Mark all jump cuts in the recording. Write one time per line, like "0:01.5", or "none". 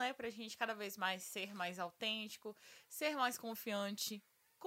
none